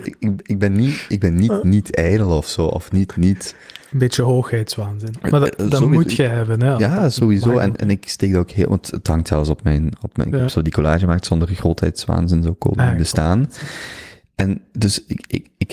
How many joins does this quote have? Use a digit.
0